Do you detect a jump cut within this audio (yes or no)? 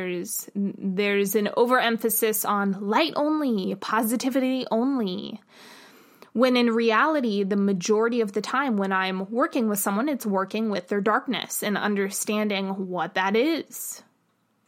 no